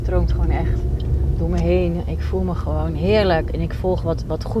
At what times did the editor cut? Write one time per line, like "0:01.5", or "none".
0:03.5